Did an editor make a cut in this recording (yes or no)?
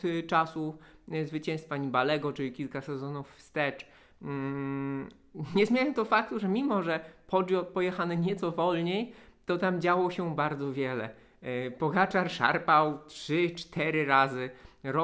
no